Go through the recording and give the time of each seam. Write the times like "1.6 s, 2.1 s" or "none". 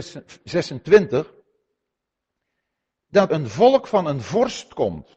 3.3 s